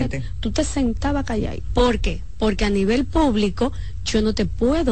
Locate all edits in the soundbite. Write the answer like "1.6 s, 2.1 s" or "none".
1.7 s